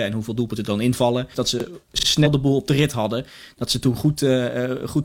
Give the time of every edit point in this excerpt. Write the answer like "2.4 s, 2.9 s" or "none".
1.3 s